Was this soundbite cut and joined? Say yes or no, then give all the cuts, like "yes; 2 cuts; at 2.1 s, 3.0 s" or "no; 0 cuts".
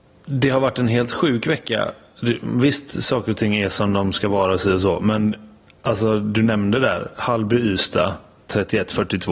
no; 0 cuts